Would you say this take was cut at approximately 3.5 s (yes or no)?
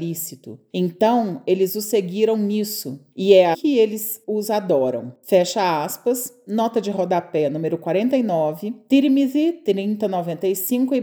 yes